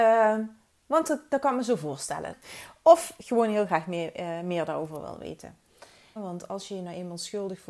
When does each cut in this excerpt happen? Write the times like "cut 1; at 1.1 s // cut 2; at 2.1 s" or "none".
cut 1; at 2.3 s // cut 2; at 6.2 s